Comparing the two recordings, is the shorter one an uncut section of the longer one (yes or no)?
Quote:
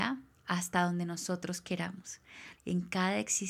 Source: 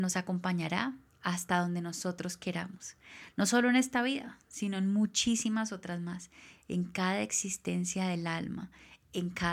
no